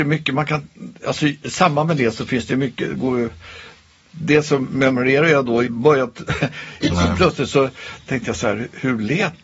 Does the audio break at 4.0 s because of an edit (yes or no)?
no